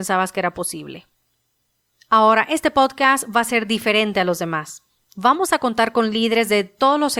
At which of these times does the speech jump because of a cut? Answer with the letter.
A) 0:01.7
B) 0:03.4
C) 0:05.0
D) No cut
D